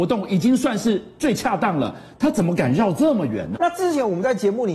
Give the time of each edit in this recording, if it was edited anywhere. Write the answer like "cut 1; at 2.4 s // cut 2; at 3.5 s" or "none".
cut 1; at 3.6 s